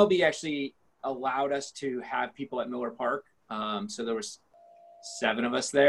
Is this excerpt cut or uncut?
uncut